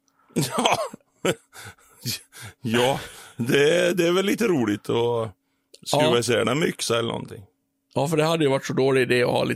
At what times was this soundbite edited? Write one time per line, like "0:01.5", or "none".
none